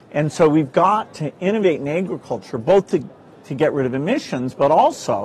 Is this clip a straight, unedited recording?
yes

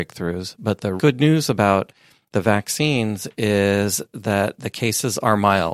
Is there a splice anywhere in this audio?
yes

